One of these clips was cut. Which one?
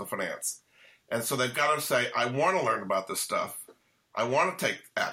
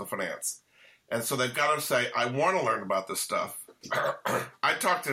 second; 1 cut; at 3.8 s

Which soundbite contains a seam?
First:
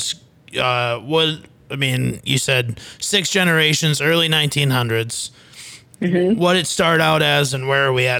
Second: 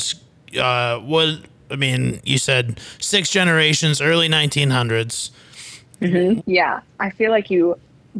second; 1 cut; at 6.4 s

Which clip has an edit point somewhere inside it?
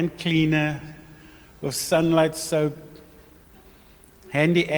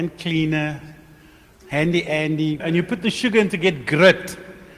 second; 2 cuts; at 1.5 s, 2.6 s

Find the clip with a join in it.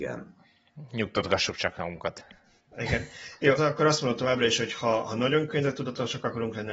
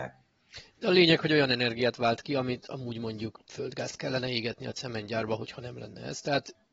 first; 1 cut; at 3.6 s

